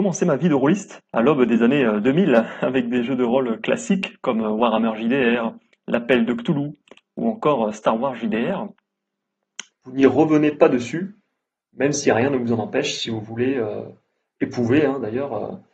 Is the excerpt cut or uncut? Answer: cut